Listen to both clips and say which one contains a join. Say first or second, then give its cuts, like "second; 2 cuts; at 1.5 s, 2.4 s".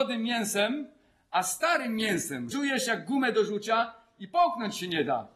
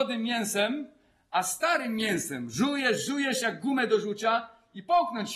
first; 1 cut; at 2.5 s